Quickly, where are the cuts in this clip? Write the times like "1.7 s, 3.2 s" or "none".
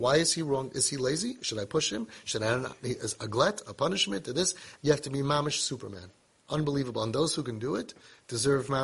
4.8 s